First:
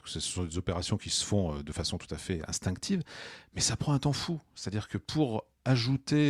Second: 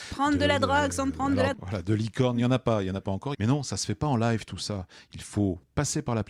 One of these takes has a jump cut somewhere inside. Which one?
second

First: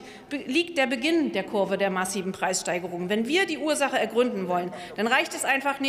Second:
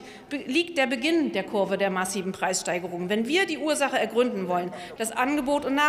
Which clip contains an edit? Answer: second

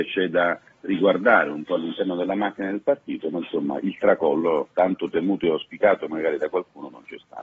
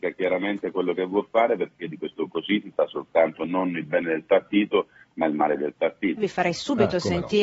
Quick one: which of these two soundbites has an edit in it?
second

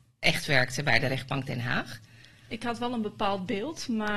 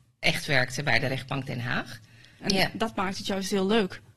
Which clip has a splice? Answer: second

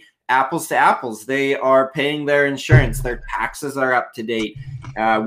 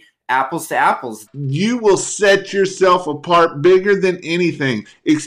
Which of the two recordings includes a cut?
second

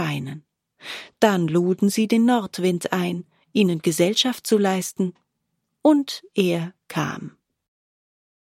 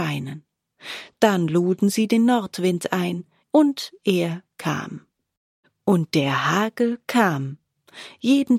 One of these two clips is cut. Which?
second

